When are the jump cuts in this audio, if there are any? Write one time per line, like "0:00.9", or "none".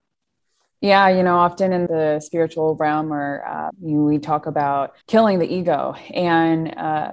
0:01.9
0:03.7
0:05.0